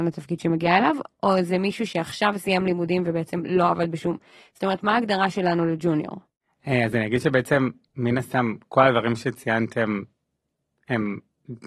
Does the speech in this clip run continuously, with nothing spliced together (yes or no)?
yes